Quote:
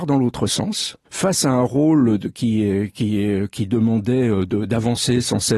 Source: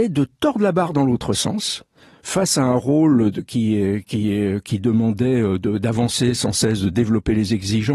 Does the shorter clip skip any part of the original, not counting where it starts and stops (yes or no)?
yes